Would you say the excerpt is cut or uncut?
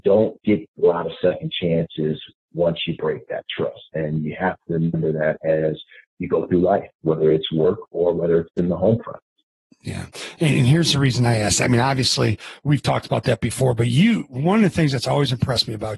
uncut